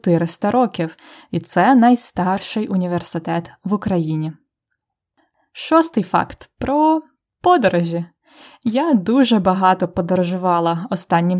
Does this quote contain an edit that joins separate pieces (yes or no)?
no